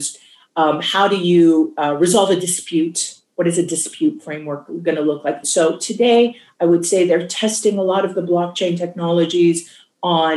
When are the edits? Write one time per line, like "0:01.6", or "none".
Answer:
0:05.4